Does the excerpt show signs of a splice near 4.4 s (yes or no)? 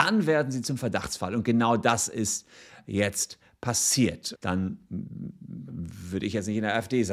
yes